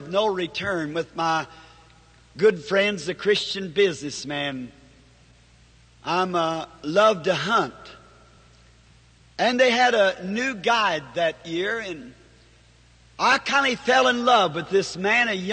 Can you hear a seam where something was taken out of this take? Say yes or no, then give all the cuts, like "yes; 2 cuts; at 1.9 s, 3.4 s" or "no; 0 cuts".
no; 0 cuts